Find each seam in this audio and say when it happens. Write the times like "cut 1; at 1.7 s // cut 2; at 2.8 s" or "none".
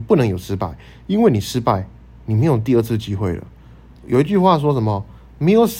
cut 1; at 3.9 s